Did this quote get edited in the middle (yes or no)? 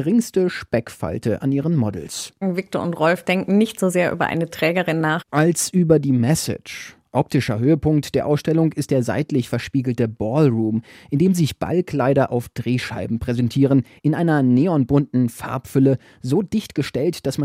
no